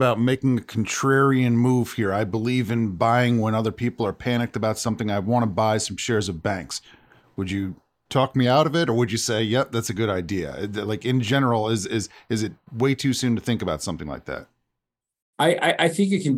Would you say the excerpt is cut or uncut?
uncut